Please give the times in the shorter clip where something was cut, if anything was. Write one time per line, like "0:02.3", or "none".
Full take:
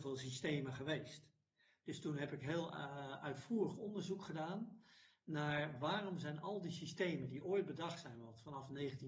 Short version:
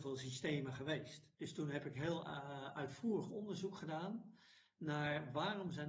0:01.3